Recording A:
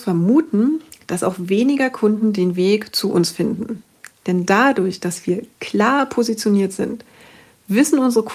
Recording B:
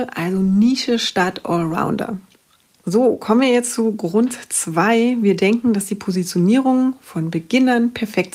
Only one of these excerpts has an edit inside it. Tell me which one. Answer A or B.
A